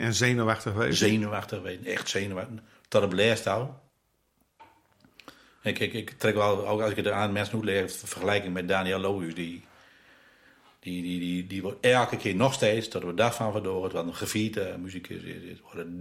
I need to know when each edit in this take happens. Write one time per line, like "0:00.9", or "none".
none